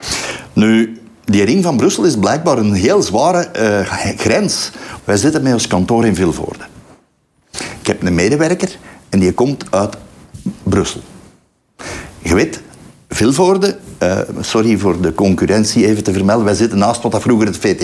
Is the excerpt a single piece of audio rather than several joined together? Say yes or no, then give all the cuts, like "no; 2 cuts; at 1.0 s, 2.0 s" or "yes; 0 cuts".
no; 2 cuts; at 5.0 s, 14.3 s